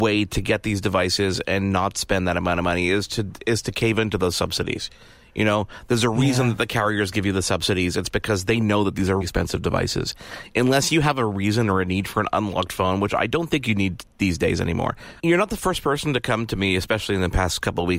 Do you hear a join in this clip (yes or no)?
yes